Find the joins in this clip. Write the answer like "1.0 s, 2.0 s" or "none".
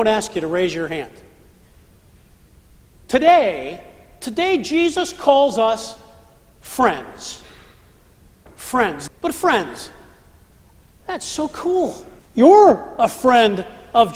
9.1 s, 12.2 s